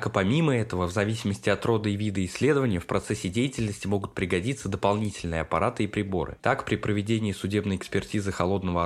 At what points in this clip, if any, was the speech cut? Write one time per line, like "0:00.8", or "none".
0:06.4